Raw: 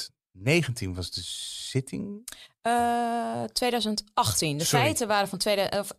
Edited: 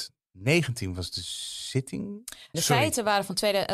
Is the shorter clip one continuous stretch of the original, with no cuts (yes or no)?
no